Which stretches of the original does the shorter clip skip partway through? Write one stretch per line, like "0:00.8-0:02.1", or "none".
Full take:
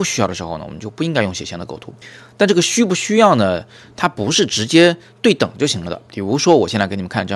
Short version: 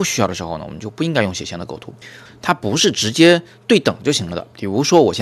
0:02.3-0:03.8